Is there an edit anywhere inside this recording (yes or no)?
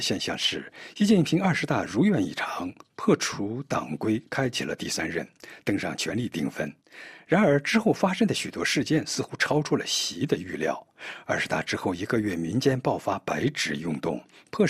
no